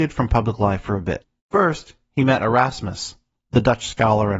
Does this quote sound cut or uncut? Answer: cut